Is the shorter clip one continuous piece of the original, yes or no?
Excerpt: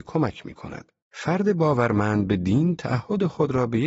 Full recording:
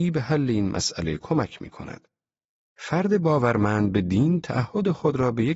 no